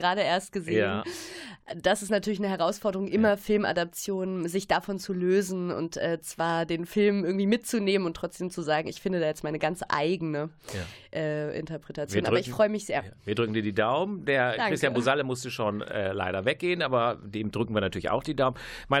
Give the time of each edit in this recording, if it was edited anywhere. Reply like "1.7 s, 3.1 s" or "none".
none